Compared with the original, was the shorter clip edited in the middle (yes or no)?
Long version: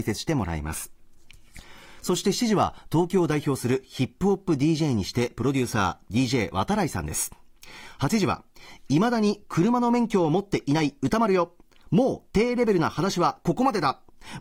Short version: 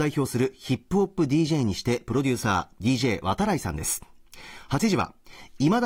no